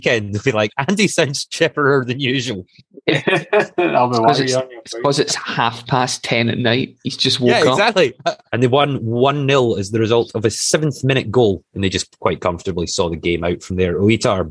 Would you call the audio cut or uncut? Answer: cut